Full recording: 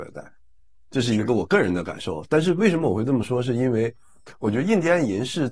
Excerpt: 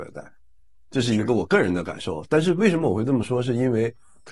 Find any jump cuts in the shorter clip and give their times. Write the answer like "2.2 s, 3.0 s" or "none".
none